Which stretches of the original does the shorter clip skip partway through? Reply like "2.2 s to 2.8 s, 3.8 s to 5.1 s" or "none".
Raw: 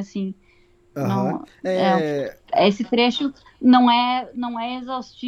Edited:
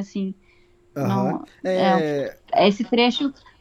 none